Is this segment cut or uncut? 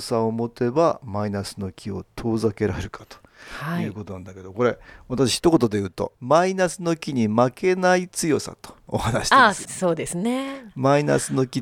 uncut